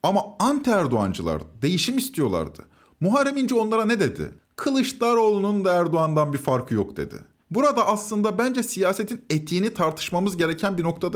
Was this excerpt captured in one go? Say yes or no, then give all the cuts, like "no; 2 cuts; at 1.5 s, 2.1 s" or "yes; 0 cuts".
yes; 0 cuts